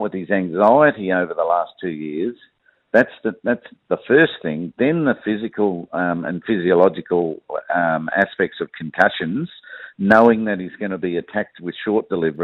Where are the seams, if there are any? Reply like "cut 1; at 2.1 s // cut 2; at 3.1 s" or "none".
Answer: none